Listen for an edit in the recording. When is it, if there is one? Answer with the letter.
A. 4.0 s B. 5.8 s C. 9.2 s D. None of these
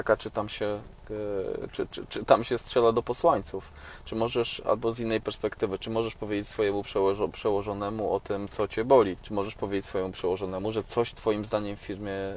C